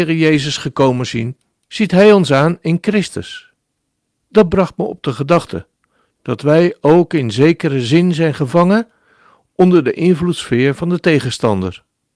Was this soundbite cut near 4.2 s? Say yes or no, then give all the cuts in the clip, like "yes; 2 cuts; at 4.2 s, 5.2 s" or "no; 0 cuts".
yes; 2 cuts; at 1.6 s, 4.2 s